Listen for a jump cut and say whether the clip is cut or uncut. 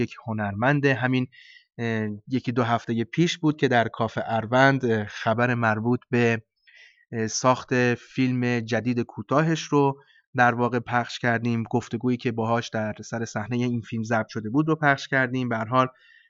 uncut